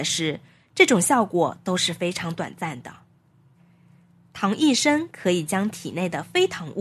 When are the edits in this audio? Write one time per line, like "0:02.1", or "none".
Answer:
none